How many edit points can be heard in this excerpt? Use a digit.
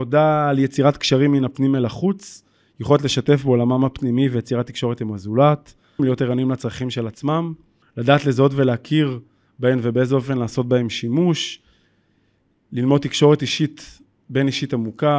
2